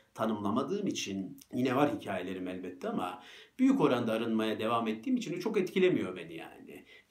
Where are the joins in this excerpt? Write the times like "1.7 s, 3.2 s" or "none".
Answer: 1.4 s